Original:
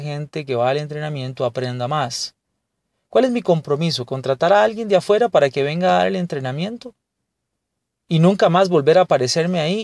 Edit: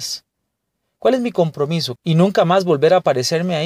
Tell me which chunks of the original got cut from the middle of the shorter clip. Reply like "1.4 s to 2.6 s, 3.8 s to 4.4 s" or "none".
4.1 s to 8.0 s